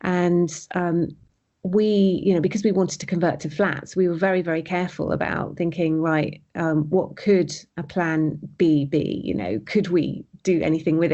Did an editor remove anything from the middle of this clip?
no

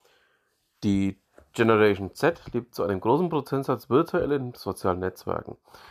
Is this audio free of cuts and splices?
yes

